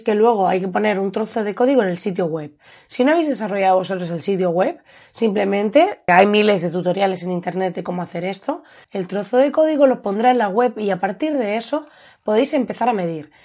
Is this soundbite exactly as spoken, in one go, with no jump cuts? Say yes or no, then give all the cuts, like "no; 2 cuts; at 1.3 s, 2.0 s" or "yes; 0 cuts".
no; 2 cuts; at 6.1 s, 8.8 s